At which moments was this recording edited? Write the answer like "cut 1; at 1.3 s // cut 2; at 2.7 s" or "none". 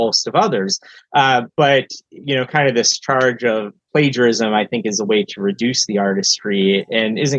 cut 1; at 1.5 s